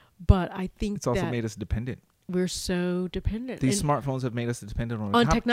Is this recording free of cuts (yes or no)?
yes